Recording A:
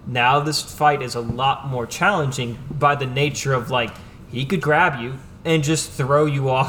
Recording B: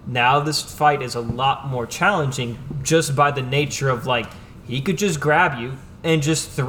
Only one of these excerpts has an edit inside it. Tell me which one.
A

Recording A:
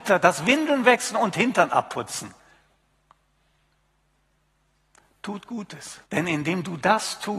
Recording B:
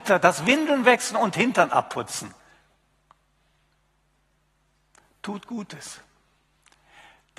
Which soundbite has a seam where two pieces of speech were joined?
A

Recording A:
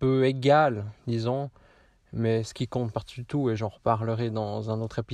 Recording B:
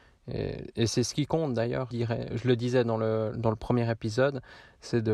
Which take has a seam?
B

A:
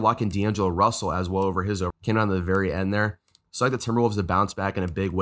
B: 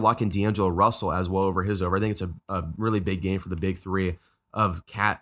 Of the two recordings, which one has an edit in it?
A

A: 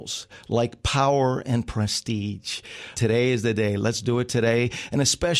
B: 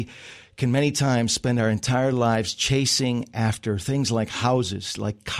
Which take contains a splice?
A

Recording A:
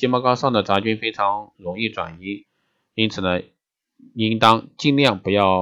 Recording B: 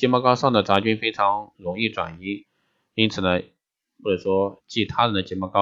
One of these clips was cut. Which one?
B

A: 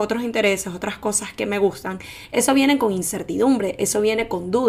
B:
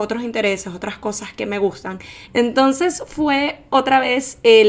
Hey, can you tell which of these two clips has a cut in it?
B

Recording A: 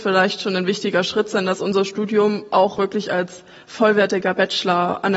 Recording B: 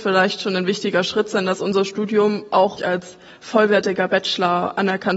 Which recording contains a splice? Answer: B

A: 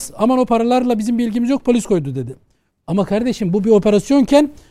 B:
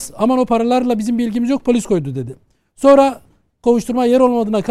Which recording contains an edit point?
A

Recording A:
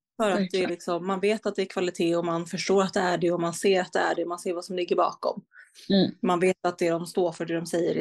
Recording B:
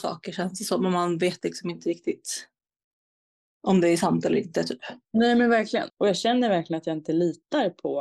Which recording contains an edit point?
B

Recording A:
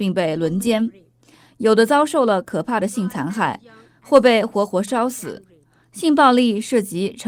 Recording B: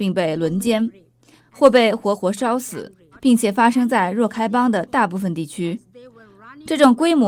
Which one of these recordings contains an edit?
B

